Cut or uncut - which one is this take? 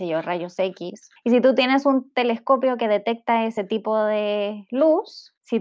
uncut